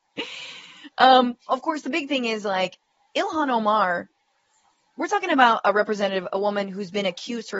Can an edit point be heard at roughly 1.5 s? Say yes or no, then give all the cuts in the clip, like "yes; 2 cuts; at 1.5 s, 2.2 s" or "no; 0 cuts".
yes; 1 cut; at 1.5 s